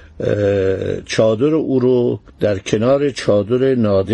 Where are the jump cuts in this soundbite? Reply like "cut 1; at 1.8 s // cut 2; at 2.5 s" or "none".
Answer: cut 1; at 2.3 s